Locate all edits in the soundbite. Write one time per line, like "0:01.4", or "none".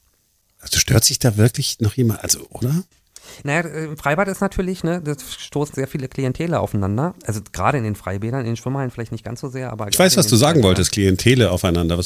0:05.7